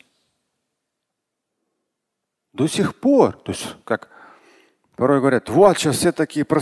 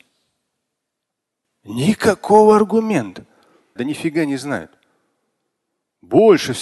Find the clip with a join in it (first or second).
second